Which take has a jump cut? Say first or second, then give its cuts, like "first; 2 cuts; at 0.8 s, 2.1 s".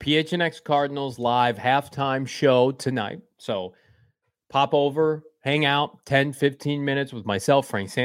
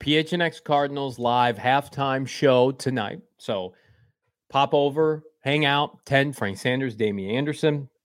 second; 1 cut; at 6.4 s